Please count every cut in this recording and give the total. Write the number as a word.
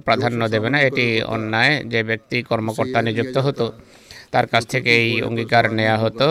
one